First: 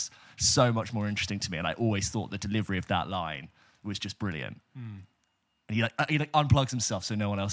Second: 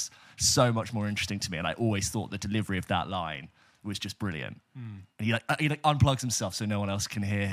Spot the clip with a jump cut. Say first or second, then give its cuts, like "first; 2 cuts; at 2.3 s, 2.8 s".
second; 1 cut; at 5.1 s